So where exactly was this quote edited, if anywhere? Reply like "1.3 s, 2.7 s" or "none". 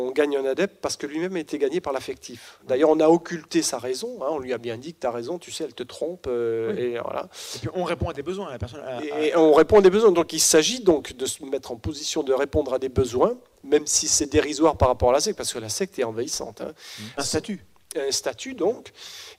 17.2 s